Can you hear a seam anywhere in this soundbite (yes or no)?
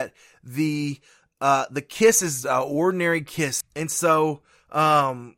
yes